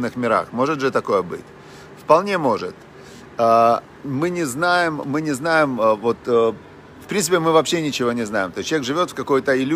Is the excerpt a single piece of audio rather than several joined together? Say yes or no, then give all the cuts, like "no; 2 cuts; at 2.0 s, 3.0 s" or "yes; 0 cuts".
yes; 0 cuts